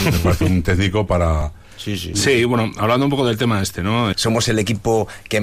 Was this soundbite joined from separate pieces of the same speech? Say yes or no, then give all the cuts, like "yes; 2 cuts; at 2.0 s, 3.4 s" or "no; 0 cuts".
yes; 2 cuts; at 2.1 s, 4.1 s